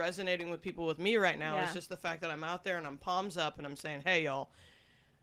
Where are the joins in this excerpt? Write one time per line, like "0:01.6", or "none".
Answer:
none